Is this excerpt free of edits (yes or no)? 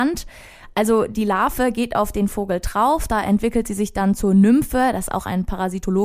yes